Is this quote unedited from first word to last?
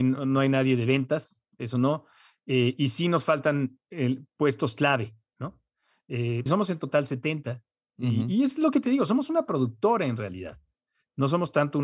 no; 1 cut; at 6.5 s

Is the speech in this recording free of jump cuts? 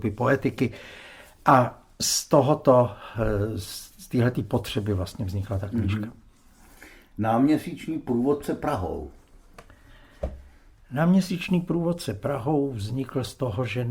yes; 0 cuts

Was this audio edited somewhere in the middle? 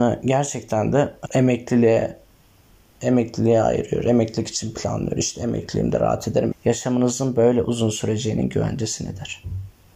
yes; 2 cuts; at 1.2 s, 6.5 s

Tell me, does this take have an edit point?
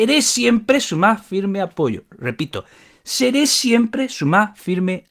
no; 0 cuts

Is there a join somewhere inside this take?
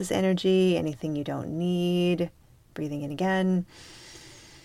no; 0 cuts

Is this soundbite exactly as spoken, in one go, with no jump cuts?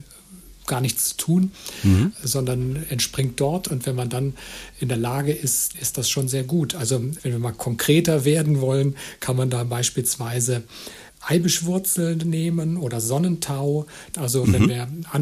no; 2 cuts; at 5.7 s, 14.1 s

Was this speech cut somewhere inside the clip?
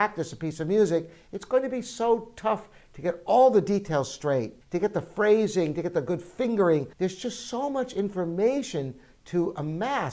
yes; 2 cuts; at 4.6 s, 6.9 s

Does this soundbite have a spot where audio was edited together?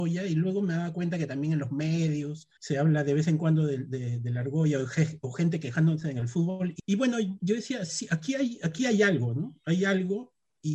no; 0 cuts

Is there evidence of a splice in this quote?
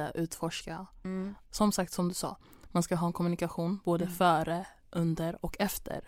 yes; 1 cut; at 1.4 s

